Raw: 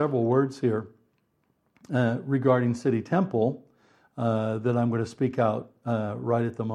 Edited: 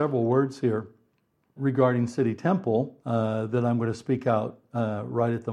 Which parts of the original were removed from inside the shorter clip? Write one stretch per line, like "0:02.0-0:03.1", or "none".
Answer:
0:01.6-0:02.2
0:03.7-0:04.1